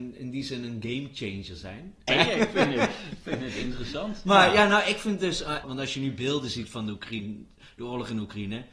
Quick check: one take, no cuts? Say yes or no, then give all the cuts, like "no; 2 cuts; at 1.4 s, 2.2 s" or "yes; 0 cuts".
no; 2 cuts; at 2.1 s, 5.6 s